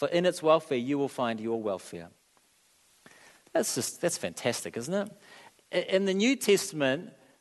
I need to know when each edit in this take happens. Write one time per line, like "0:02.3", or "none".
none